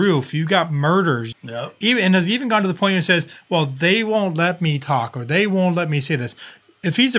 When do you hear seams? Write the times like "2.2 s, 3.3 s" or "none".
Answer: 1.3 s

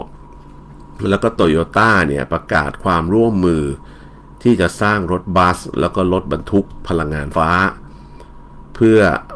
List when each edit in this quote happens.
7.3 s

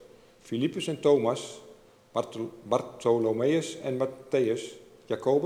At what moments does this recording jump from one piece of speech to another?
none

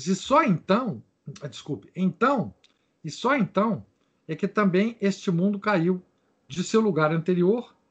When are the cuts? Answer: none

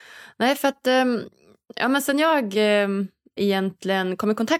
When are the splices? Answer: 3.4 s

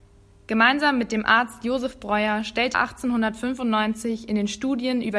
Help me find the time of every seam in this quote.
2.7 s

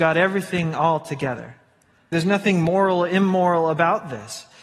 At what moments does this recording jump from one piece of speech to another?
2.1 s

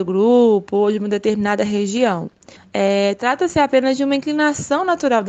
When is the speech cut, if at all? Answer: 2.6 s

